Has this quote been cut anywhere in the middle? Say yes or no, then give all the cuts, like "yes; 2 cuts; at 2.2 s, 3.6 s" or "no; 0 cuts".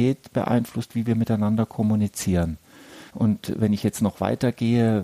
yes; 1 cut; at 3.1 s